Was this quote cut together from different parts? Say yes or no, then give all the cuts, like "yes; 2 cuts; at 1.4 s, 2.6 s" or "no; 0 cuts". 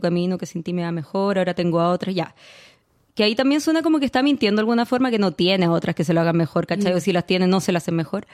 no; 0 cuts